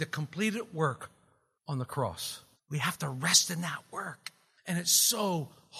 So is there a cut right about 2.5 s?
yes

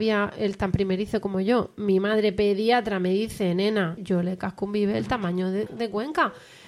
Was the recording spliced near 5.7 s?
yes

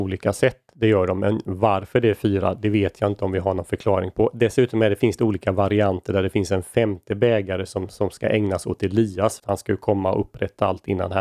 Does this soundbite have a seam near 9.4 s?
yes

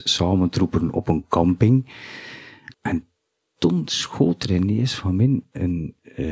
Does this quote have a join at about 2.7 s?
yes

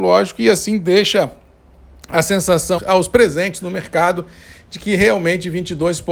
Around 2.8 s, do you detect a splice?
yes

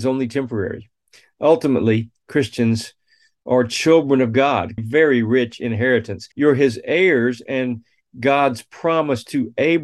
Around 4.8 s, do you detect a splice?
yes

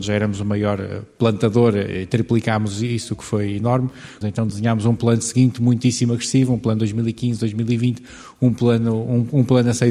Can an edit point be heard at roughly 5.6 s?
no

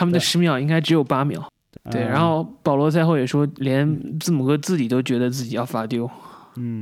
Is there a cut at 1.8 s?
yes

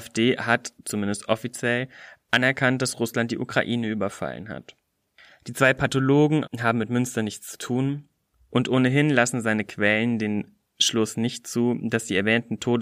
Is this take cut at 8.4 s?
no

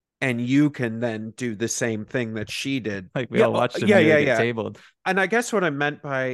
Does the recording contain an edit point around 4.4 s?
no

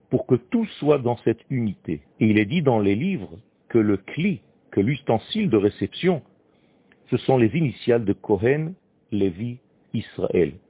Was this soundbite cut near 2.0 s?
yes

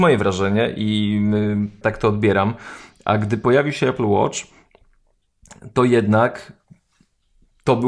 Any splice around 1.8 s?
yes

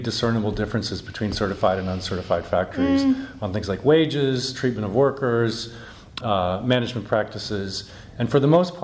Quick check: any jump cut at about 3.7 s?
no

